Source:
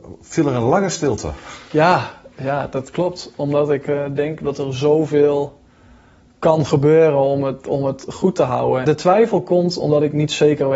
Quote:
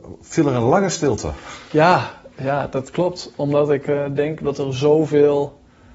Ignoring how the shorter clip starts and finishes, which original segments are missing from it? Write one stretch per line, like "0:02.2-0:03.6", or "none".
none